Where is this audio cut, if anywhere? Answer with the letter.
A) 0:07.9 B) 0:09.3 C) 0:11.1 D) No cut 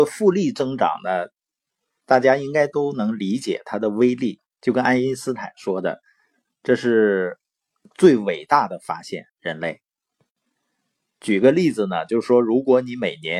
D